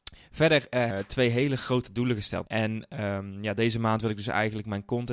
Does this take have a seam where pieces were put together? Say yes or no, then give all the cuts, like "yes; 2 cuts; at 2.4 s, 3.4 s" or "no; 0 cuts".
yes; 2 cuts; at 0.9 s, 2.5 s